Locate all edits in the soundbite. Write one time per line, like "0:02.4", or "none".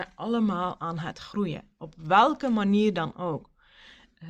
none